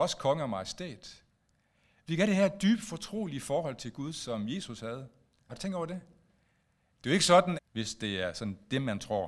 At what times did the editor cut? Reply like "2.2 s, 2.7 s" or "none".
5.5 s, 7.6 s